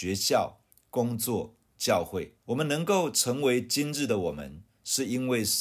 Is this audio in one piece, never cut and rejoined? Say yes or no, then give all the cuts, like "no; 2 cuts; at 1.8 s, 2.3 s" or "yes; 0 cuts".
no; 1 cut; at 2.4 s